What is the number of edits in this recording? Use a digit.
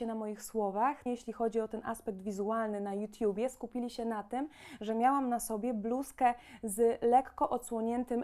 1